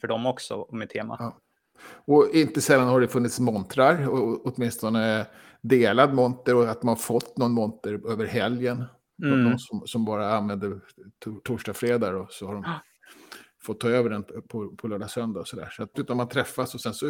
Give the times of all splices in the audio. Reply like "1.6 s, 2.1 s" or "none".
15.9 s